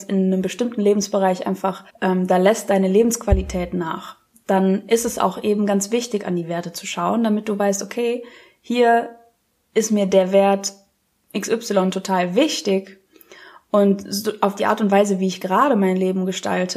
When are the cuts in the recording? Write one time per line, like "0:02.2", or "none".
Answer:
0:01.9